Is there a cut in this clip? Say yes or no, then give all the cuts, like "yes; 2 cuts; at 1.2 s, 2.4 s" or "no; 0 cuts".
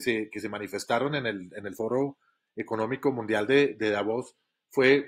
no; 0 cuts